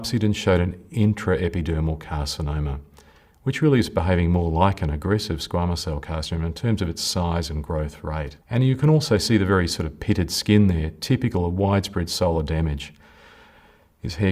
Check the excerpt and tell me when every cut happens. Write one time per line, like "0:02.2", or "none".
0:08.4

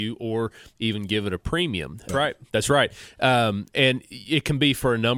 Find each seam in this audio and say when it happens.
0:02.1

